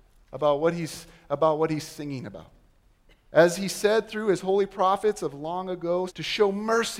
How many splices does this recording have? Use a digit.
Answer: 1